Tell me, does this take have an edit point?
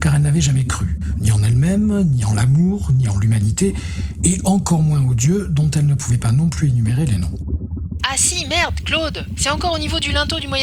yes; 1 cut; at 8.0 s

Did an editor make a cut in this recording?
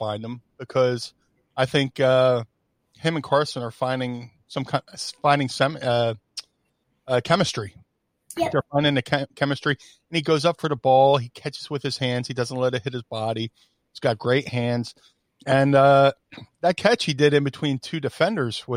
no; 0 cuts

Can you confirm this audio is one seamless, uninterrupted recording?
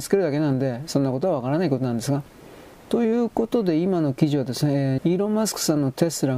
no; 2 cuts; at 2.7 s, 5.0 s

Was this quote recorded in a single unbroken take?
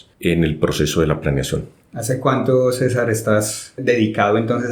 no; 1 cut; at 3.8 s

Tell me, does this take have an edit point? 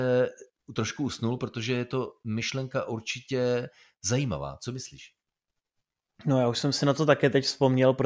no; 0 cuts

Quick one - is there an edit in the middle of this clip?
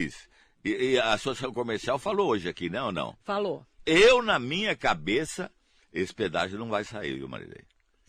yes; 1 cut; at 3.8 s

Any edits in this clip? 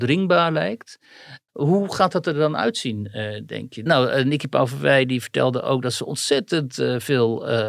yes; 2 cuts; at 1.5 s, 3.9 s

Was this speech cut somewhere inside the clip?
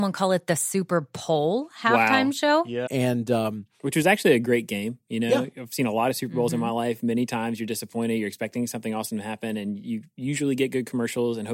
yes; 1 cut; at 2.9 s

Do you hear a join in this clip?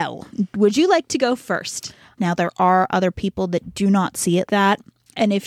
yes; 2 cuts; at 2.2 s, 4.5 s

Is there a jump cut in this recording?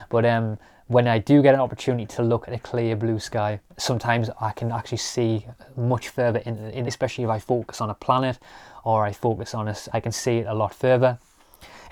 yes; 3 cuts; at 3.7 s, 6.9 s, 9.9 s

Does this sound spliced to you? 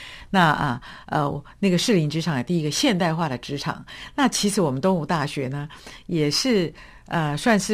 no; 0 cuts

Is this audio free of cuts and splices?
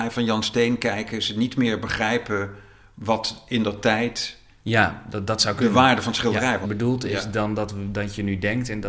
no; 1 cut; at 6.6 s

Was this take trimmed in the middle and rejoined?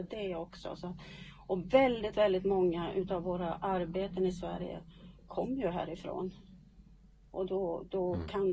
no; 0 cuts

